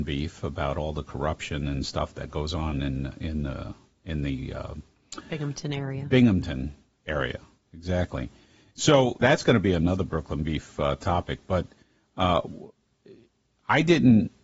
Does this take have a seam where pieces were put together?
yes; 1 cut; at 9.2 s

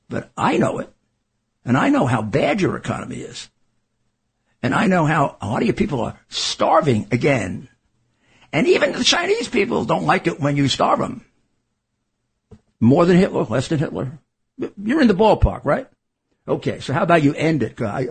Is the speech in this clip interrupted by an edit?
yes; 1 cut; at 12.7 s

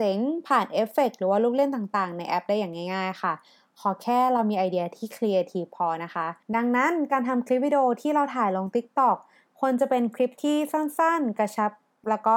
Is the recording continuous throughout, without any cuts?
no; 1 cut; at 6.4 s

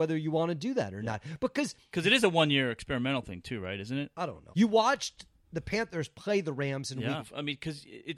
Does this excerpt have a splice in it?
yes; 2 cuts; at 4.5 s, 7.2 s

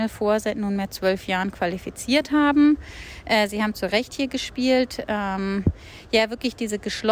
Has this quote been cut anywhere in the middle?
no; 0 cuts

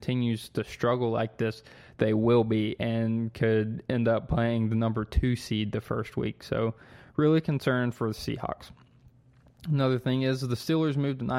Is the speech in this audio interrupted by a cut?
no; 0 cuts

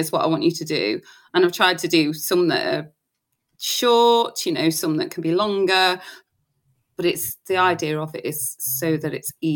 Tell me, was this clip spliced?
no; 0 cuts

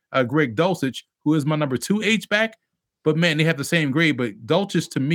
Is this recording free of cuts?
yes; 0 cuts

